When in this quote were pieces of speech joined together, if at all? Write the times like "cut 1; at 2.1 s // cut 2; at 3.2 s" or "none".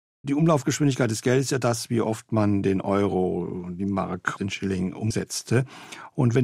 none